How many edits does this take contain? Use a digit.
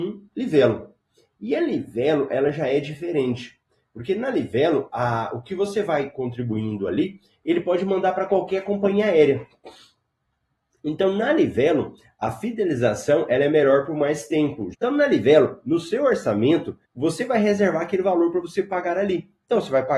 2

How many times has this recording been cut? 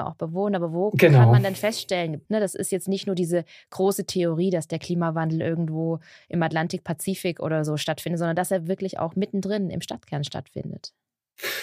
1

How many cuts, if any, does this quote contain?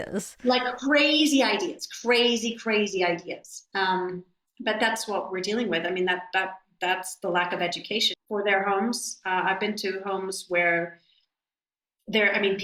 1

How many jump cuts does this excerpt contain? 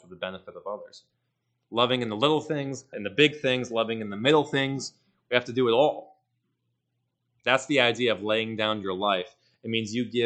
1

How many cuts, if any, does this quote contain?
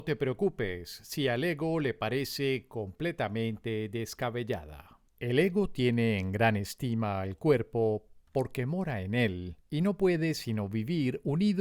2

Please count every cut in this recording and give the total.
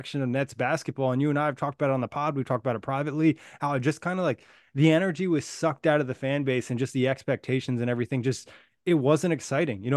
0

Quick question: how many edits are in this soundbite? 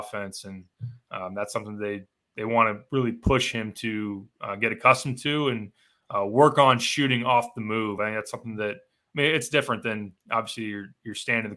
0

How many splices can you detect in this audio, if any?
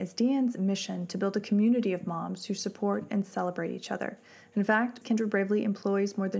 1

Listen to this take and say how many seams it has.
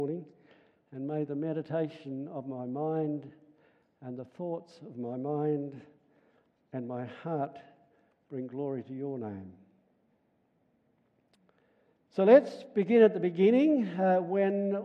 0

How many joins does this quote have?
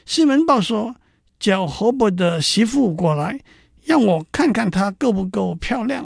0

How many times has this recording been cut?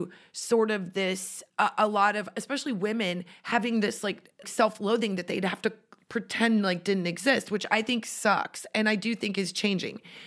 2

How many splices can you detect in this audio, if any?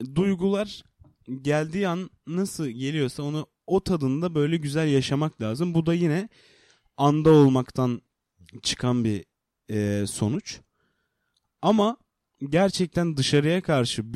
1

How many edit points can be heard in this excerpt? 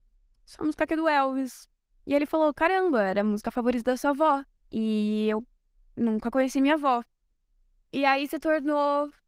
2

